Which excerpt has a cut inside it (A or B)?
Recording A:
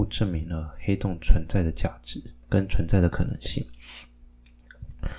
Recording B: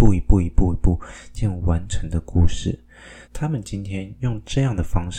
B